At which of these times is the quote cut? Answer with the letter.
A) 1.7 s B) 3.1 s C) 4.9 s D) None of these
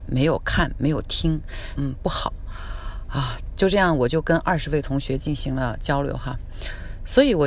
A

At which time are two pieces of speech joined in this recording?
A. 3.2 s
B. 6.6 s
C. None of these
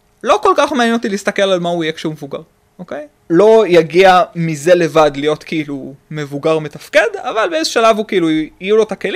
A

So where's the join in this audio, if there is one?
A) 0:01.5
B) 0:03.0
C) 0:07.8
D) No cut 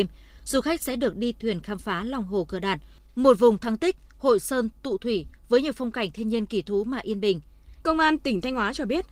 C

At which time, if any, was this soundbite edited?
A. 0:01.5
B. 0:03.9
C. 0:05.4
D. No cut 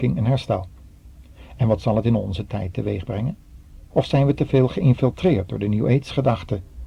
B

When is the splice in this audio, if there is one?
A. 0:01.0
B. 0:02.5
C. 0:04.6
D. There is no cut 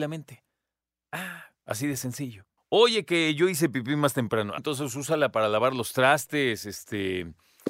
C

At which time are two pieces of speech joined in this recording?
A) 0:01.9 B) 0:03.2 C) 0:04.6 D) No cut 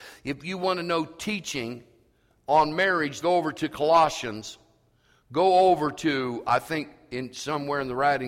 B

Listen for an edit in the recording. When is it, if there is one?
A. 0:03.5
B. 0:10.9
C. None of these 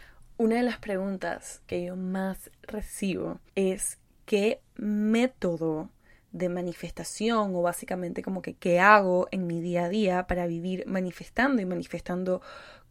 A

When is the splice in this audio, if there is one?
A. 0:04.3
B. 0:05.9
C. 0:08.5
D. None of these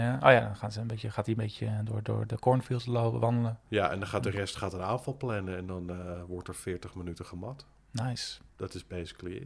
C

